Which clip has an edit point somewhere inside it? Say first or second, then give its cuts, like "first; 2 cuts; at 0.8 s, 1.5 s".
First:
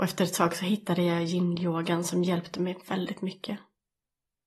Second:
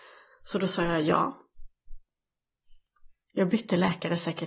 second; 1 cut; at 3.2 s